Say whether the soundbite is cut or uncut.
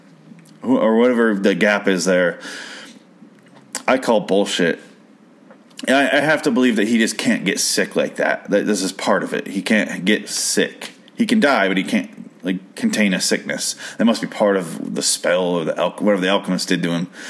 uncut